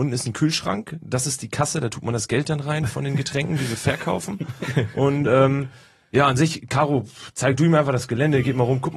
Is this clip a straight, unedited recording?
yes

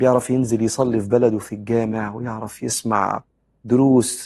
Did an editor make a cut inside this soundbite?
no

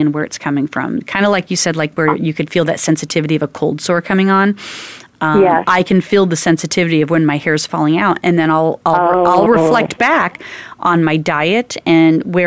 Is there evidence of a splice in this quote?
no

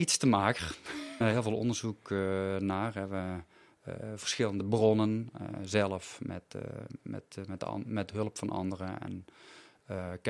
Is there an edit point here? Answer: yes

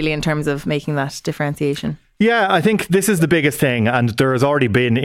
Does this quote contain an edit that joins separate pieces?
no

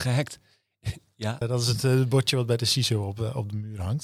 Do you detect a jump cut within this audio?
yes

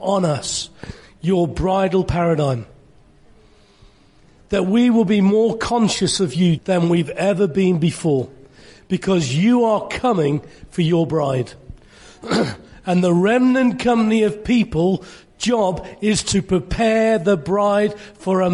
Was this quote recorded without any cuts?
no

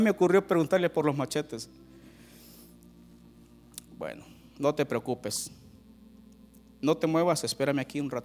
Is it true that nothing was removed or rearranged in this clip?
yes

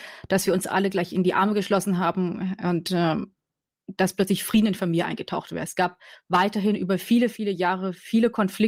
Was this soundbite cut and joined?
no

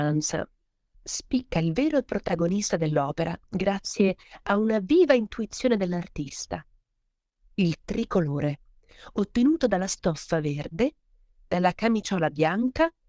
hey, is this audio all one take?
no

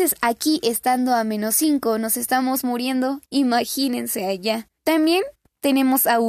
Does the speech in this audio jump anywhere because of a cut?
yes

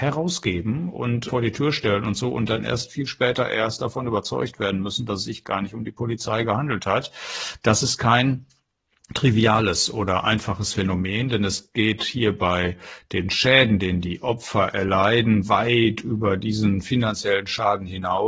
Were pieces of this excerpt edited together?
no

